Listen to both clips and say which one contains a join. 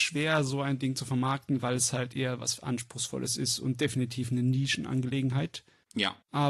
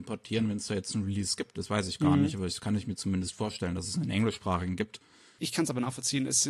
second; 1 cut; at 5.4 s

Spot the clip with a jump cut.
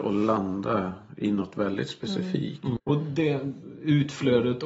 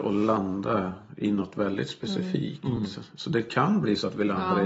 first; 1 cut; at 2.8 s

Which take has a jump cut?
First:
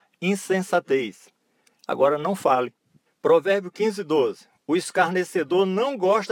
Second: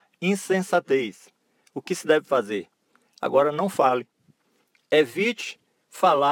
first; 2 cuts; at 1.7 s, 3.1 s

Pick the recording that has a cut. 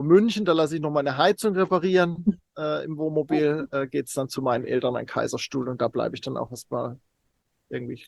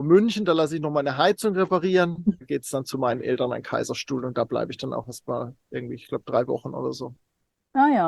second; 2 cuts; at 2.4 s, 5.6 s

